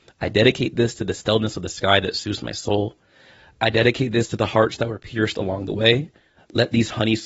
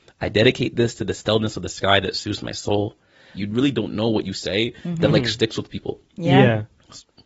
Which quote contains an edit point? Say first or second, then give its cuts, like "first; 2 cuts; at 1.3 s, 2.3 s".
second; 1 cut; at 3.3 s